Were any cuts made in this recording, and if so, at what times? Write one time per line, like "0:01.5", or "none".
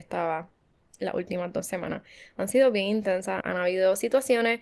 0:03.4

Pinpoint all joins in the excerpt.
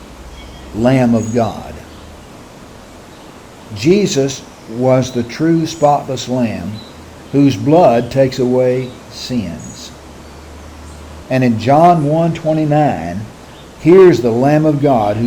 0:11.2
0:13.8

